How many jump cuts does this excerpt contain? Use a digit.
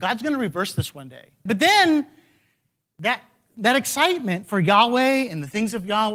1